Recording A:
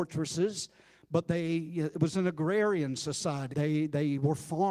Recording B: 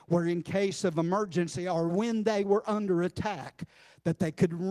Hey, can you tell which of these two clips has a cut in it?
A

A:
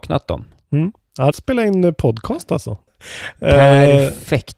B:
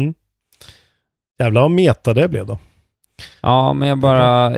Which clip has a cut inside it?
A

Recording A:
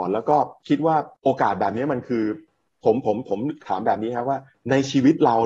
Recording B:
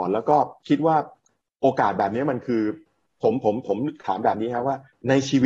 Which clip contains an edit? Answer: A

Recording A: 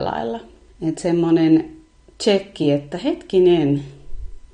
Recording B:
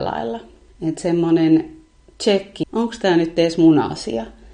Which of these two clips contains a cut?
B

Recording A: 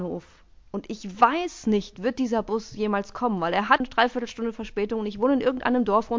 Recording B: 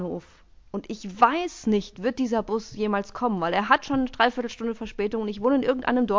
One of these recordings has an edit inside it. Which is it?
A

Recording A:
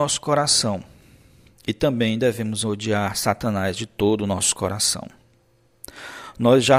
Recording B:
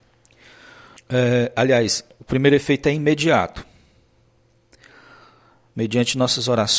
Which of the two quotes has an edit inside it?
B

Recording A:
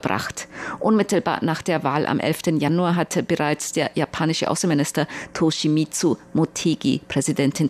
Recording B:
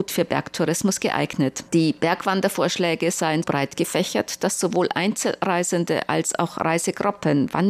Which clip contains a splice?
B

